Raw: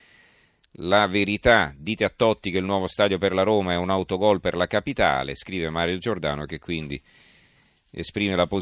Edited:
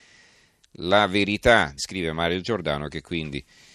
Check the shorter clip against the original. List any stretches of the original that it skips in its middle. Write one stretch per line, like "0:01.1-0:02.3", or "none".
0:01.8-0:05.3